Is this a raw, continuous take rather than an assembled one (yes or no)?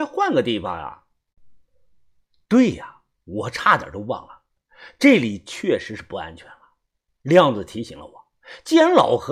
yes